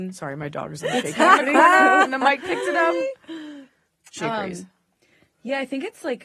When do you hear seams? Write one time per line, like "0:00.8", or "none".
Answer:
none